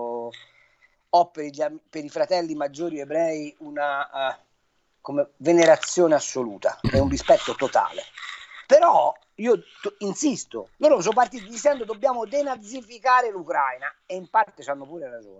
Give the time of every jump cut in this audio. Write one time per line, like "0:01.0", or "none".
0:08.7
0:10.7